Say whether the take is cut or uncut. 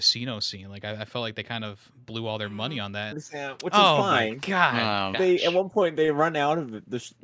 cut